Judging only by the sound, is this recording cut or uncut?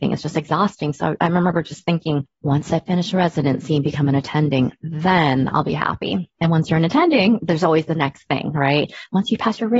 cut